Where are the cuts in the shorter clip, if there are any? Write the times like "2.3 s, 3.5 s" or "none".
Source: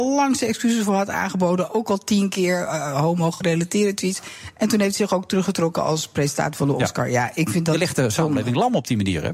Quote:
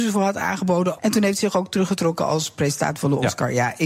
1.0 s